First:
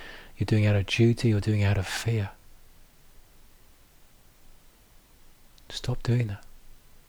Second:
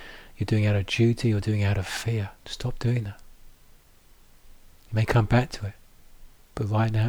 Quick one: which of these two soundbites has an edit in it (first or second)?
second